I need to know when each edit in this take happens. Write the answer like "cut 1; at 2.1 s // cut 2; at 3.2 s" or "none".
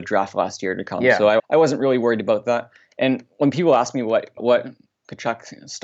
cut 1; at 1.4 s // cut 2; at 4.4 s